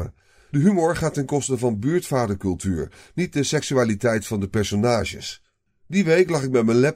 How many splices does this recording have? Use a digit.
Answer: 1